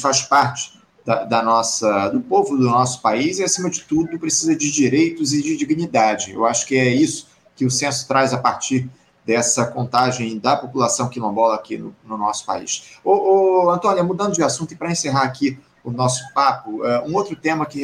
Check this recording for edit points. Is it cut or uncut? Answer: uncut